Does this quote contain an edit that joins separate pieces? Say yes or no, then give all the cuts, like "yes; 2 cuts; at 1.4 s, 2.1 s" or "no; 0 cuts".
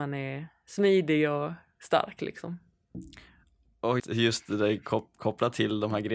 yes; 1 cut; at 4.0 s